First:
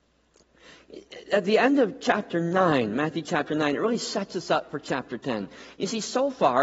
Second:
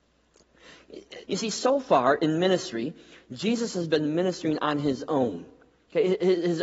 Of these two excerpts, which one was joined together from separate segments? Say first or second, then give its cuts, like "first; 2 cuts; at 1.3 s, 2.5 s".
second; 1 cut; at 1.2 s